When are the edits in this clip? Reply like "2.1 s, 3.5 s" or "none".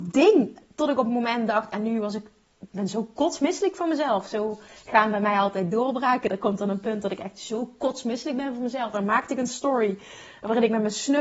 8.9 s